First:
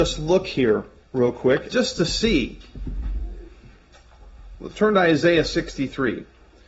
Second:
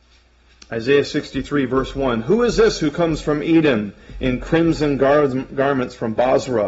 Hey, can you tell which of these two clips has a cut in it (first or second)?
first